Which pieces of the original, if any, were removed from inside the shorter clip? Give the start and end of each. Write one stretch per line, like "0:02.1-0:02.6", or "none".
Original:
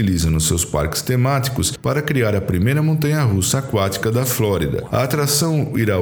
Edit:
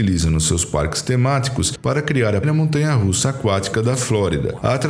0:02.4-0:02.7